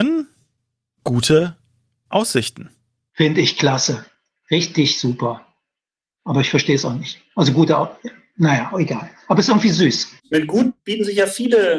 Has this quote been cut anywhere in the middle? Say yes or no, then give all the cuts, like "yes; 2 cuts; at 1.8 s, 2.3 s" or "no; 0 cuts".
no; 0 cuts